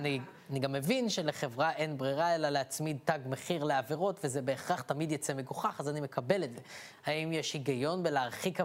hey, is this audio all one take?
no; 1 cut; at 7.0 s

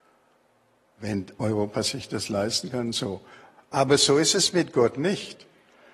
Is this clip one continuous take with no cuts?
yes; 0 cuts

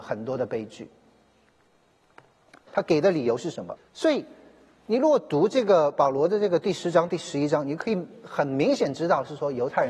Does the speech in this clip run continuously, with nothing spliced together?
no; 2 cuts; at 2.7 s, 3.8 s

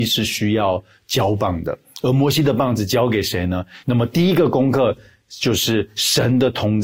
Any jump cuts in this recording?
yes; 1 cut; at 3.8 s

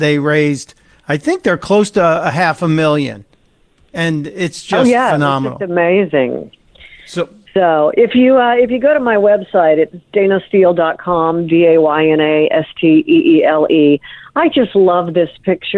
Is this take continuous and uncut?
yes; 0 cuts

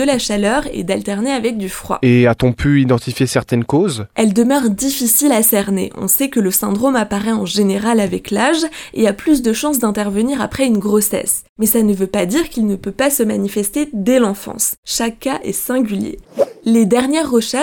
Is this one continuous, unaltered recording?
yes; 0 cuts

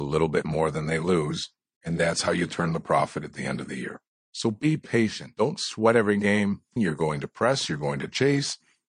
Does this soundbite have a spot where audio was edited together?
yes; 1 cut; at 6.8 s

